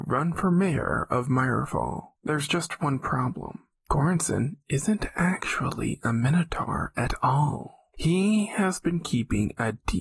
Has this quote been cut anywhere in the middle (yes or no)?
yes